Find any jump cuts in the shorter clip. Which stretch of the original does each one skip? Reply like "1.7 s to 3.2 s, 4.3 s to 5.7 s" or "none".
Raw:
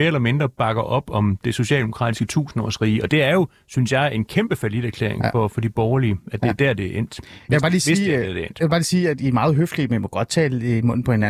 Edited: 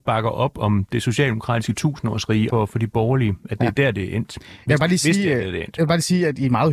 3.0 s to 5.3 s